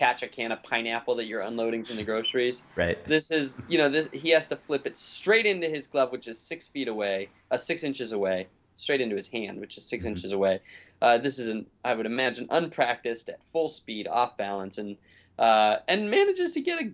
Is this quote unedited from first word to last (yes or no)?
yes